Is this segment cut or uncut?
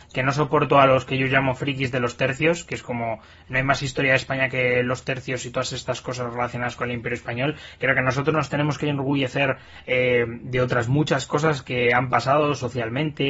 uncut